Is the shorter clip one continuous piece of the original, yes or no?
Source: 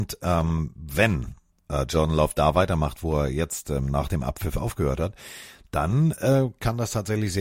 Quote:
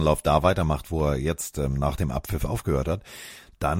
yes